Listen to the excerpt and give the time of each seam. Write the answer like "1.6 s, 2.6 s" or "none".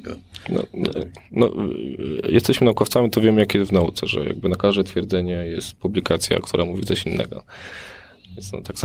none